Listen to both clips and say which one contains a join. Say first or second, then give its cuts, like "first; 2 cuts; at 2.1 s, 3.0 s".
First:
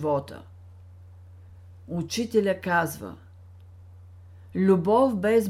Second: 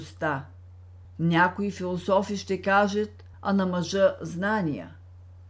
second; 2 cuts; at 1.0 s, 3.3 s